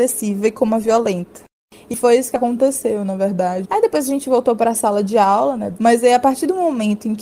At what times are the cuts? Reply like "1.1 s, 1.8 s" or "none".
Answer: 3.6 s, 5.8 s